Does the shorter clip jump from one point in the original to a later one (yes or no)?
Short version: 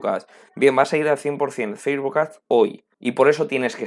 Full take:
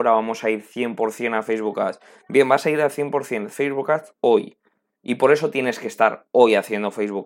yes